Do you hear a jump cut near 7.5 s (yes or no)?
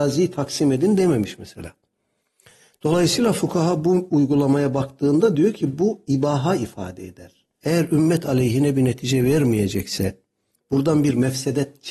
yes